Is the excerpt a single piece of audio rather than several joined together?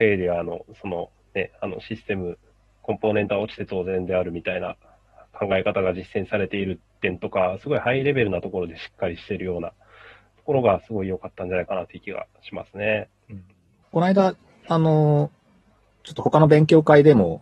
yes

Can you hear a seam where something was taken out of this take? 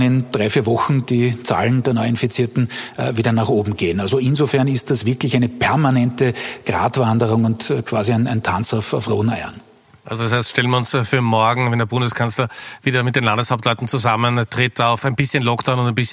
no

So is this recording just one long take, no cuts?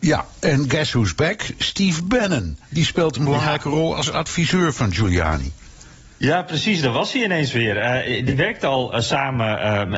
yes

